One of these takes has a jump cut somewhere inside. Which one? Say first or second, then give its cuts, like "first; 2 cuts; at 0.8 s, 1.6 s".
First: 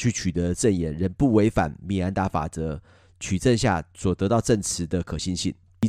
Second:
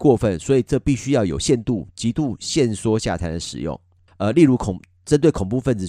second; 1 cut; at 4.1 s